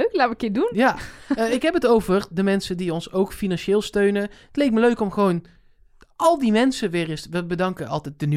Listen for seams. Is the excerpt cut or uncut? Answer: uncut